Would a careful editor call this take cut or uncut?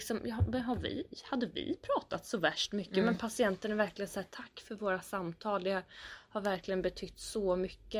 uncut